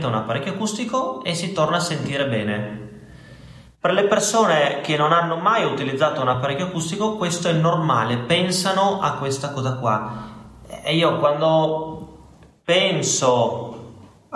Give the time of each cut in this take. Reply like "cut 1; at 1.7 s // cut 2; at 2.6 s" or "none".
none